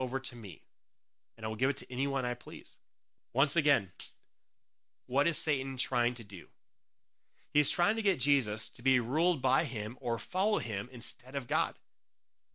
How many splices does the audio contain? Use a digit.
1